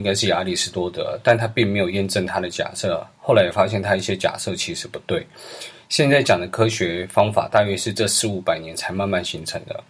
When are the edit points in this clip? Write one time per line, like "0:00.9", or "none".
none